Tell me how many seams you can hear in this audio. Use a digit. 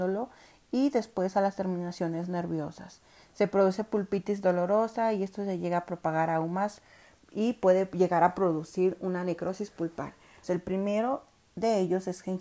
1